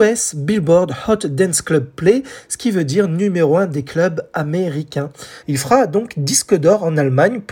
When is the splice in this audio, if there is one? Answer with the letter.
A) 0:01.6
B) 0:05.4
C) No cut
B